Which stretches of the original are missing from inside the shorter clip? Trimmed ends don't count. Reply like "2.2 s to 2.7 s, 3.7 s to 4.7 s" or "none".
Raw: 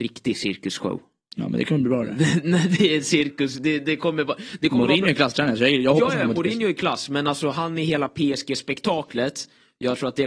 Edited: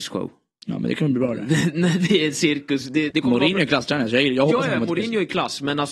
3.8 s to 4.6 s